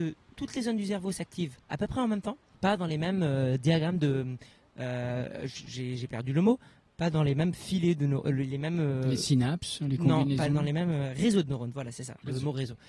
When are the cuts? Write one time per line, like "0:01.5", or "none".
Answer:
0:02.5